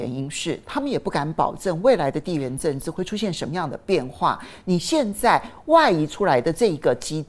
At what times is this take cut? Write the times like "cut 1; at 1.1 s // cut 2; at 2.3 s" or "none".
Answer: none